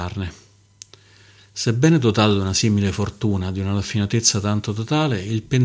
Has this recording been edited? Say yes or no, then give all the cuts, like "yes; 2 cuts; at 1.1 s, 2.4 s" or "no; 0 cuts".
no; 0 cuts